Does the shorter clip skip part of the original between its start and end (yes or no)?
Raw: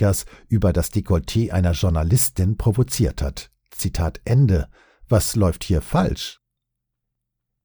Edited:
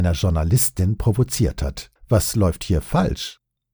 yes